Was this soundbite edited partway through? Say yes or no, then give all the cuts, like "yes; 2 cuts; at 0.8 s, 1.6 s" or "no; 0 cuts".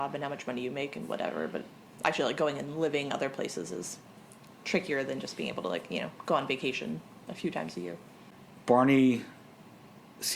no; 0 cuts